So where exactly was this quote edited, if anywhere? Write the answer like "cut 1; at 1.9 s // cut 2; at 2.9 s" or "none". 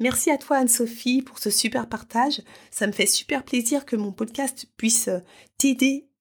none